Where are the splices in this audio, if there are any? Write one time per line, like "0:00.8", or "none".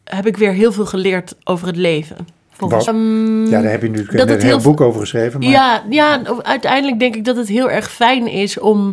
0:02.9